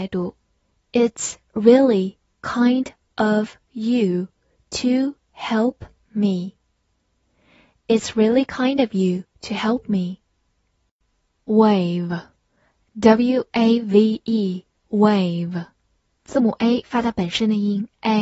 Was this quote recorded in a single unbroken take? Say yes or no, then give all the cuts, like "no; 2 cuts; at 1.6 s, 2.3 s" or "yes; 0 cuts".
yes; 0 cuts